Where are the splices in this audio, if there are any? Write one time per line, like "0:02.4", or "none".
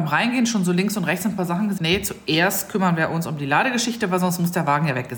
0:01.8